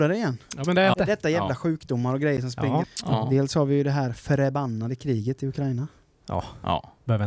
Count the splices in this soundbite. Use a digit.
2